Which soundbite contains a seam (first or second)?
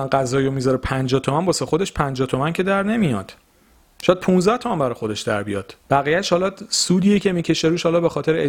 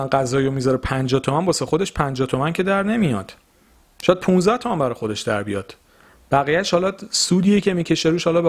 first